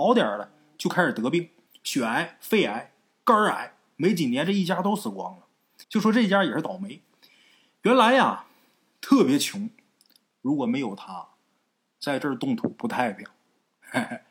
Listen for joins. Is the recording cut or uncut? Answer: cut